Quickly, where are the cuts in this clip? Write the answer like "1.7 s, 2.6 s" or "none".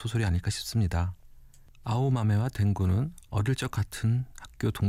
1.7 s